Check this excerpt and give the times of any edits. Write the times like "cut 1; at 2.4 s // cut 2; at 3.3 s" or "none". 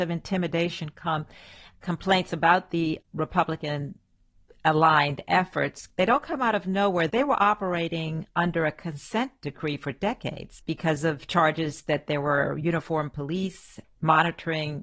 cut 1; at 7.1 s // cut 2; at 10.6 s // cut 3; at 13.8 s